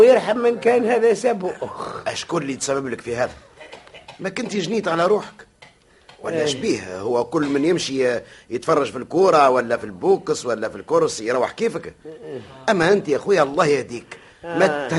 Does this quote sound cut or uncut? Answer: uncut